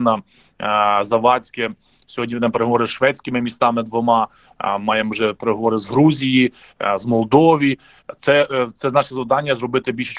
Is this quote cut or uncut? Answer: uncut